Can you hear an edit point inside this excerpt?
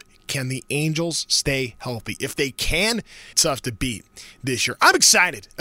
yes; 1 cut; at 3.3 s

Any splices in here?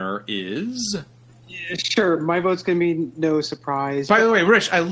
no; 0 cuts

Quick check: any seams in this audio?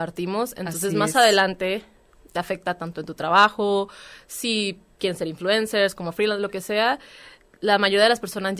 no; 0 cuts

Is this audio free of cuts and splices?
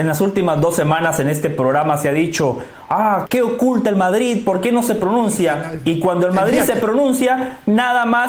no; 1 cut; at 3.2 s

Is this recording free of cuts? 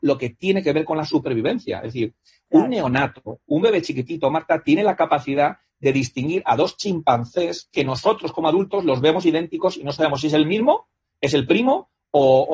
yes; 0 cuts

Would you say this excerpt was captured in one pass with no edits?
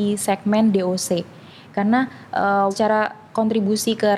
no; 1 cut; at 2.7 s

